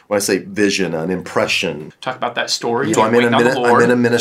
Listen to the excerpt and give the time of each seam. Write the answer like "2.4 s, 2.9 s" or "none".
1.9 s, 2.9 s